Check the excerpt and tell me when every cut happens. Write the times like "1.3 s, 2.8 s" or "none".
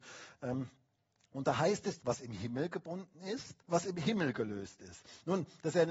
2.0 s, 3.6 s